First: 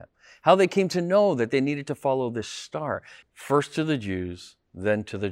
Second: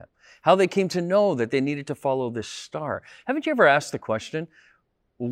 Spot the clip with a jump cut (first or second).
first